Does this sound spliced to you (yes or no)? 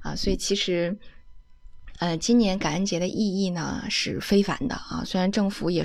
no